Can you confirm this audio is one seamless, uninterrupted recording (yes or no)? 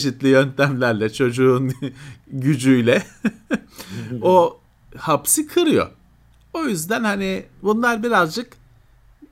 yes